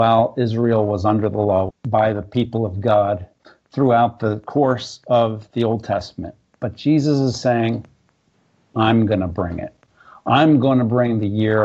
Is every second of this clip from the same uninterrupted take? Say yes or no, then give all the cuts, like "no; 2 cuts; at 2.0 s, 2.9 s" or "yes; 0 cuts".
no; 1 cut; at 1.7 s